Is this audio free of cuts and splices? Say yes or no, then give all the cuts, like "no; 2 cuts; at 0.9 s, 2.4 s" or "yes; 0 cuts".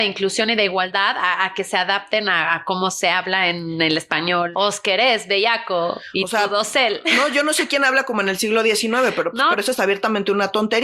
no; 2 cuts; at 4.5 s, 9.5 s